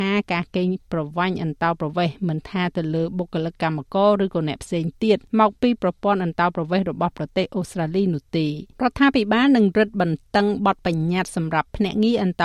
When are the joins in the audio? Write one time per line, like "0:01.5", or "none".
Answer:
0:05.3
0:08.7